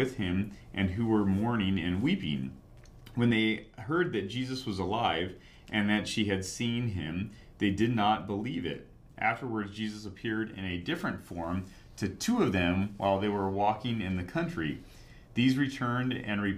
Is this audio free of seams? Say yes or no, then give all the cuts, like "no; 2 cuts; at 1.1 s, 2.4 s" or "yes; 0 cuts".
yes; 0 cuts